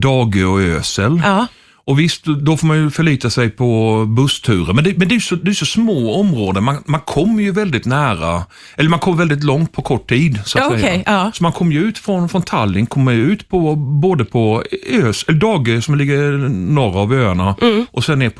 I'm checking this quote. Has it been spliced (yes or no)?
no